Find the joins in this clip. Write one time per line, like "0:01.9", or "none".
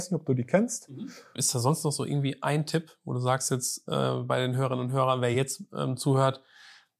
0:01.4